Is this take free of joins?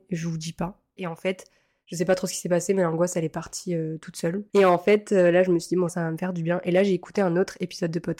no; 3 cuts; at 1.0 s, 4.5 s, 5.9 s

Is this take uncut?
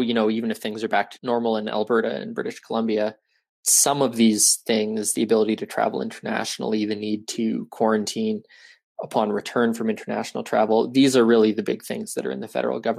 yes; 0 cuts

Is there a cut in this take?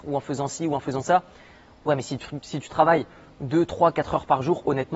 no; 0 cuts

